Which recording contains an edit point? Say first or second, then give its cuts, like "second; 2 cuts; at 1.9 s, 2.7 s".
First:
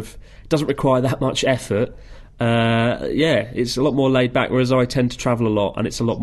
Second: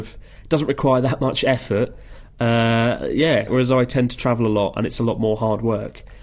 second; 1 cut; at 3.5 s